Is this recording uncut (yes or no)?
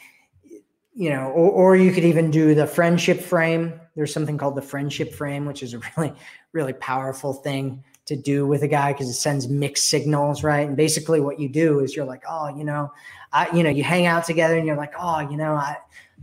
yes